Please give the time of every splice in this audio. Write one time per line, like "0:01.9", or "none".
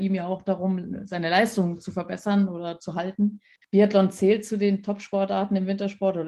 0:03.6